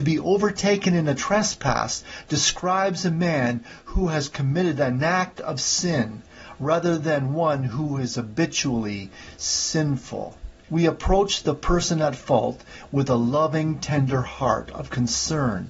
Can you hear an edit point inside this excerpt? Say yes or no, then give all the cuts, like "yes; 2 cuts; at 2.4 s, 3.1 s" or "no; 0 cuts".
yes; 1 cut; at 10.6 s